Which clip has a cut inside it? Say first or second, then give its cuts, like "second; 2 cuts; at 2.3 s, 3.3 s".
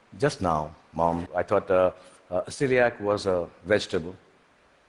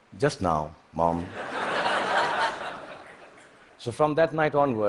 first; 1 cut; at 1.3 s